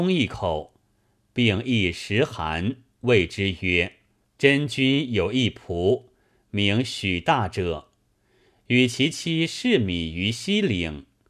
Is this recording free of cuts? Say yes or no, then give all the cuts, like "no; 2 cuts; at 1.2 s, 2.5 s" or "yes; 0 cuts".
no; 1 cut; at 4.2 s